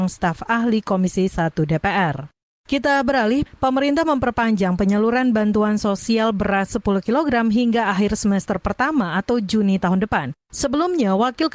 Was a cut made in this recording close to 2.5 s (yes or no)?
no